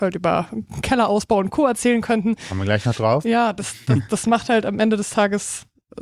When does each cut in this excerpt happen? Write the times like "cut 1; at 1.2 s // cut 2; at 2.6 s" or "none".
none